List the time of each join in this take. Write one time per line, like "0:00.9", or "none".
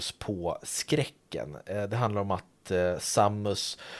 none

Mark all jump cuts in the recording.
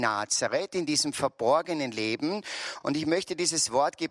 none

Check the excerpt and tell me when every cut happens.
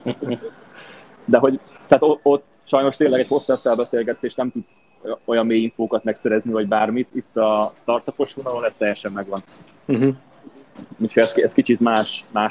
none

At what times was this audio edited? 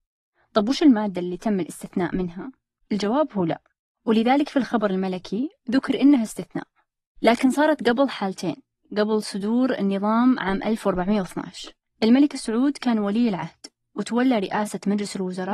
0:02.8

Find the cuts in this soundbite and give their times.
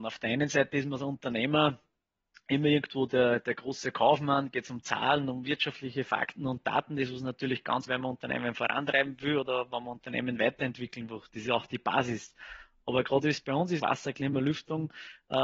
0:07.9
0:13.8

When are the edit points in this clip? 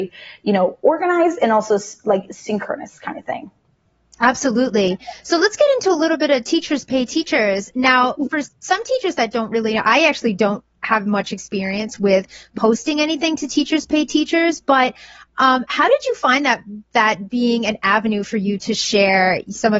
none

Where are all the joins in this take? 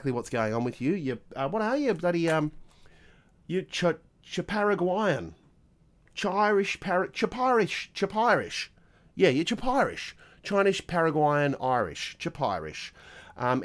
none

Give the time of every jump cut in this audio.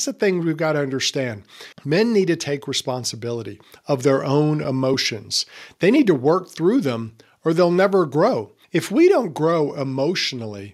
0:01.7
0:08.6

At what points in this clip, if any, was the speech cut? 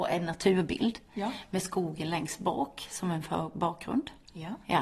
none

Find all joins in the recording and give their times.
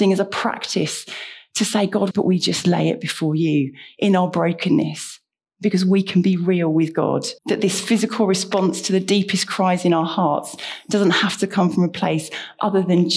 0:02.1
0:07.4

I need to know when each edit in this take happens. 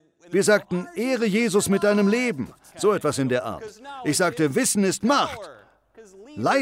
0:02.7

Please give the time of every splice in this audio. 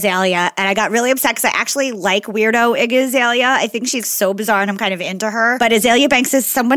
0:04.0

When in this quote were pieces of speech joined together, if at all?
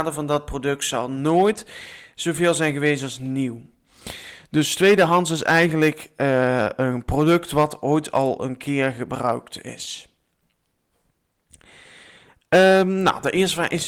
none

